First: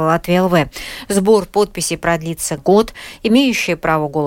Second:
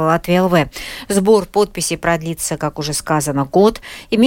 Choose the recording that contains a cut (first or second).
first